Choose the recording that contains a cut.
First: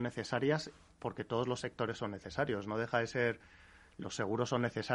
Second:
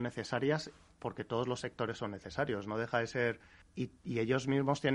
second; 1 cut; at 3.6 s

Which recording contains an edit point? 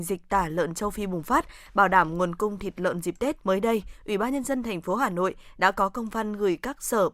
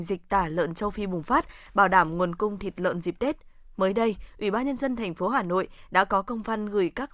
first; 1 cut; at 3.4 s

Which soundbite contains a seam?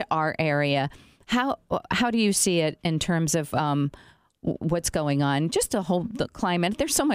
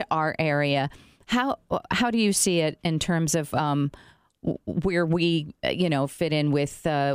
first; 1 cut; at 4.6 s

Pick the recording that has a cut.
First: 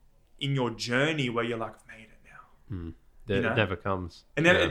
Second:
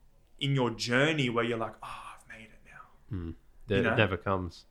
first; 1 cut; at 1.8 s

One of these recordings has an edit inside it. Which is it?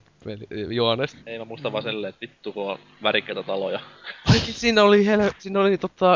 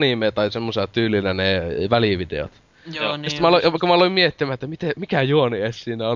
first; 1 cut; at 1.2 s

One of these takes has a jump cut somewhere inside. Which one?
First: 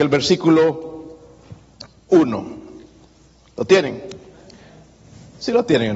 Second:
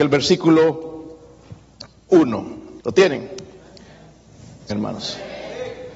second; 2 cuts; at 2.8 s, 4.7 s

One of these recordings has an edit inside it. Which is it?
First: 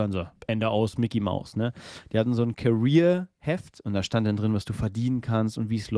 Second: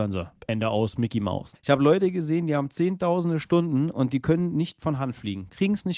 second; 1 cut; at 1.5 s

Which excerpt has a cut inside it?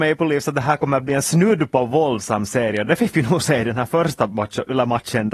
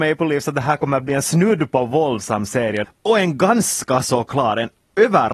second; 1 cut; at 2.8 s

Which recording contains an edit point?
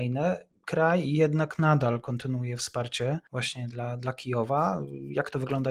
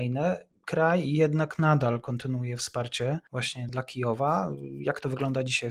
second; 1 cut; at 3.7 s

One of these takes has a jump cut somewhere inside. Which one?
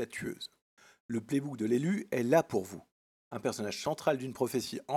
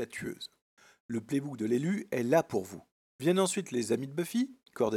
second; 1 cut; at 3.1 s

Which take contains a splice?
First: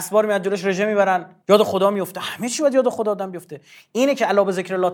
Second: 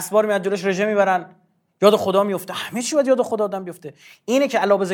first; 1 cut; at 1.4 s

